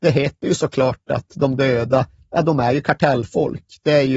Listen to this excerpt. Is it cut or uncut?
uncut